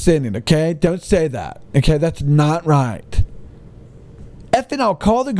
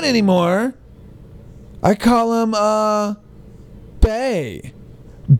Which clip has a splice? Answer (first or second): second